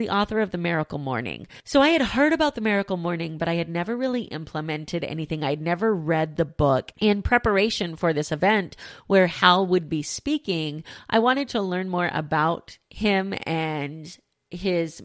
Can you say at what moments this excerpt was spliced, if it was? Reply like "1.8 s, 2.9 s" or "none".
6.9 s